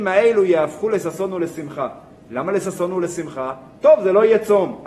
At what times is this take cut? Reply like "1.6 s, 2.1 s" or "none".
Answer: none